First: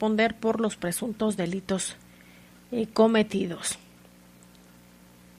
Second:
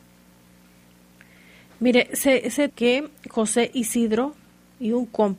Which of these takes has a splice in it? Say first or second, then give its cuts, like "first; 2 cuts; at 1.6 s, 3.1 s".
second; 1 cut; at 2.7 s